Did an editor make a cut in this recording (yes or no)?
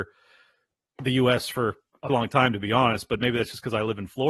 yes